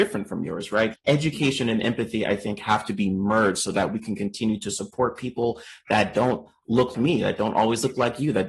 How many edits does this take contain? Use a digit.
2